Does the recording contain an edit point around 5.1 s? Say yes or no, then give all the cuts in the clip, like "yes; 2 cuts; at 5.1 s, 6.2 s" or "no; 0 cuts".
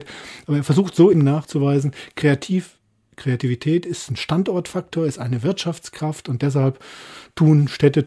no; 1 cut; at 1.1 s